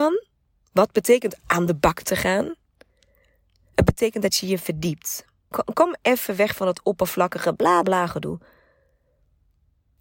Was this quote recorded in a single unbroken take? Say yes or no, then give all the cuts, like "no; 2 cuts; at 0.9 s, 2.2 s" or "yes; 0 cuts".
no; 2 cuts; at 5.5 s, 7.8 s